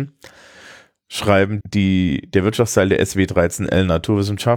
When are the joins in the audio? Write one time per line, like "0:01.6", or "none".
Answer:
0:01.6